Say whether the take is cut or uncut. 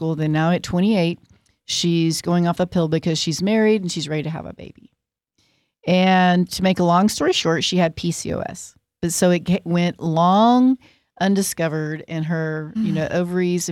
uncut